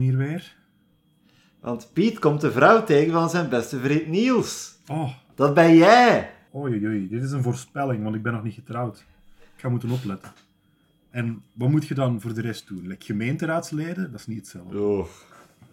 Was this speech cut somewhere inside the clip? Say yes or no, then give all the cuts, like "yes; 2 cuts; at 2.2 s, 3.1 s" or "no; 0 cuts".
yes; 2 cuts; at 6.5 s, 11.1 s